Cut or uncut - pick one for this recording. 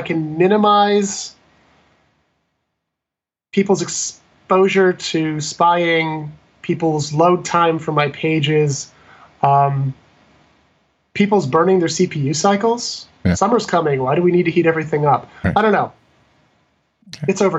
uncut